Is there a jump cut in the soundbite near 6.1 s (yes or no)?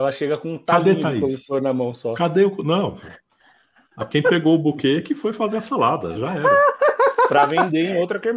yes